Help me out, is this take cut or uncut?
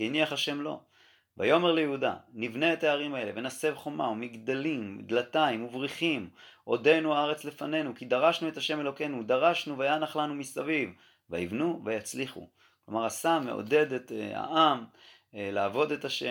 uncut